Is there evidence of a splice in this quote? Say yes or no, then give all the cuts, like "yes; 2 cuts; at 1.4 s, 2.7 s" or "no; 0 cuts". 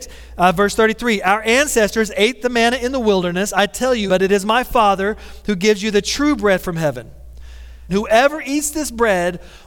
yes; 2 cuts; at 4.1 s, 7.9 s